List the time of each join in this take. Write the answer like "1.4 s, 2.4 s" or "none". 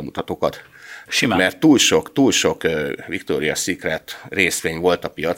1.1 s